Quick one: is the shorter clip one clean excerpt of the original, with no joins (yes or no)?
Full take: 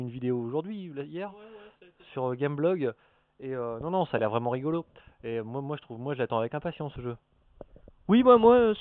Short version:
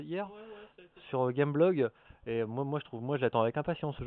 no